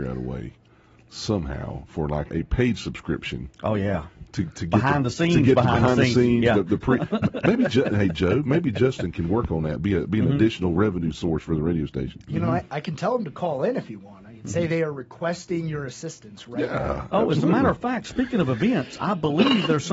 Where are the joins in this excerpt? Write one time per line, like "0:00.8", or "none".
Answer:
0:02.3